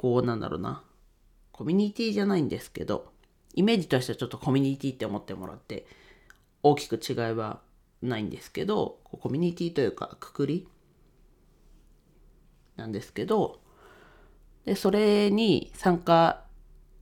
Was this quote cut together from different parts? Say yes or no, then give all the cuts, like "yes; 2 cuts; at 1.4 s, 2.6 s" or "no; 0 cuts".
no; 0 cuts